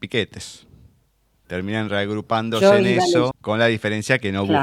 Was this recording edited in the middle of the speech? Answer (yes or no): yes